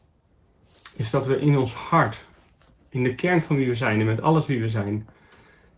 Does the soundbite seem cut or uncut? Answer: uncut